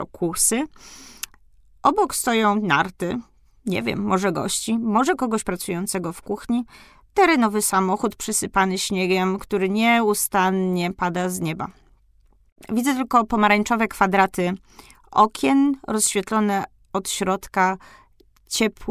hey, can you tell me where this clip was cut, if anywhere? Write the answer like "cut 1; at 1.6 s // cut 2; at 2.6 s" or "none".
none